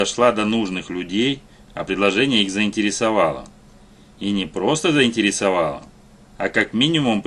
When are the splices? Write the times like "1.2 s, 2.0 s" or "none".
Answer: none